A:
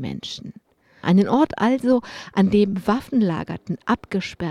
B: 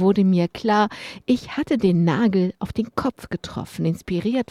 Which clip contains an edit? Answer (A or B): A